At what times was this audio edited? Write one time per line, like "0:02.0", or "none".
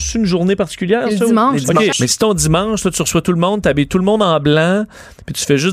0:01.9